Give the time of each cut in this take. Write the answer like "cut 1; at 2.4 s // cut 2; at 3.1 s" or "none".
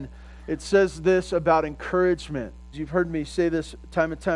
cut 1; at 2.7 s